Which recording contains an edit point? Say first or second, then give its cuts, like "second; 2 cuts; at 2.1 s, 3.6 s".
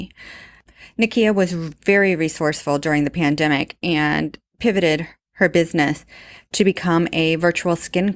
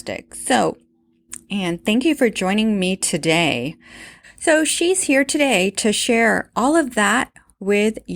second; 2 cuts; at 1.5 s, 4.2 s